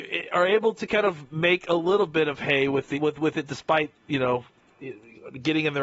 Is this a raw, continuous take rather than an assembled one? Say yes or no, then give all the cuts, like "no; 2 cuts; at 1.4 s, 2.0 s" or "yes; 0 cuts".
no; 1 cut; at 2.9 s